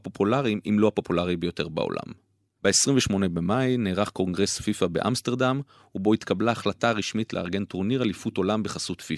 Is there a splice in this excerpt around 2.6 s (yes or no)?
yes